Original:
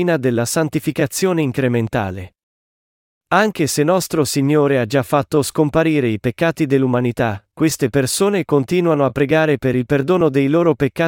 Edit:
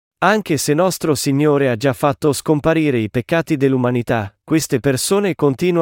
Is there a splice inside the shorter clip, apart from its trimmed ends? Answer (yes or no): no